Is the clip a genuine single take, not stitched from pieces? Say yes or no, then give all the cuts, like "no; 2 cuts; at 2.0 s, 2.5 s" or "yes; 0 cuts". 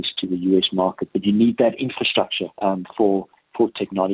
no; 1 cut; at 2.5 s